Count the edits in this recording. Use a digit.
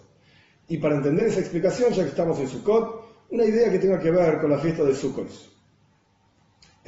0